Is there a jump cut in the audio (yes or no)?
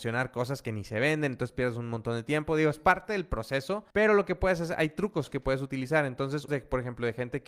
yes